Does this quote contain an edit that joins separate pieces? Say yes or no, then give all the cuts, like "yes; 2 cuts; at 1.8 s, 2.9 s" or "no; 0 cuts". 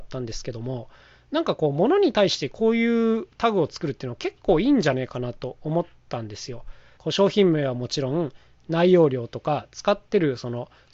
yes; 1 cut; at 7.0 s